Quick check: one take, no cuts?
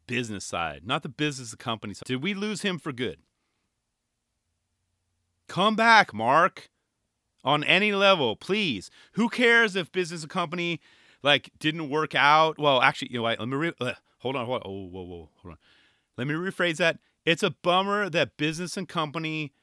no; 1 cut; at 2.0 s

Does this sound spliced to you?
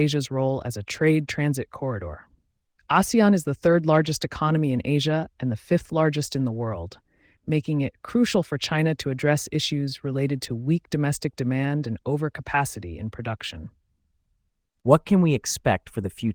no; 0 cuts

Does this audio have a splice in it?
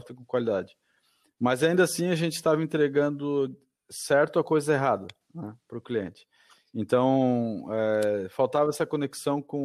no; 0 cuts

